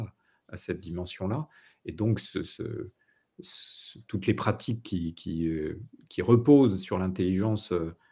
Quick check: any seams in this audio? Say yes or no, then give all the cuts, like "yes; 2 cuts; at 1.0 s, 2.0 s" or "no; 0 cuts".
no; 0 cuts